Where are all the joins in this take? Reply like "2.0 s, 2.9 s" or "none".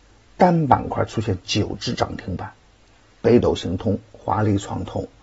none